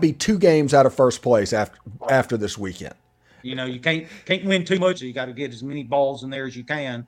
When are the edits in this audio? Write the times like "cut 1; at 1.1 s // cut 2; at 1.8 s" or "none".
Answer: cut 1; at 3.4 s // cut 2; at 5.0 s